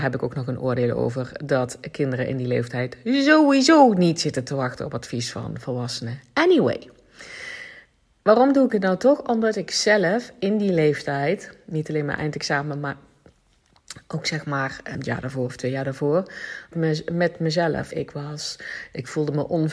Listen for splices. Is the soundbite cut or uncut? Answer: cut